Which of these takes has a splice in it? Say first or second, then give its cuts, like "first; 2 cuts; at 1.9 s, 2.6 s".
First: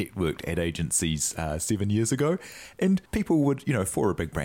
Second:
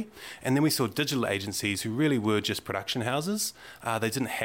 first; 1 cut; at 3.1 s